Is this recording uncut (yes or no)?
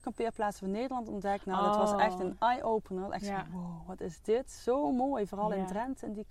yes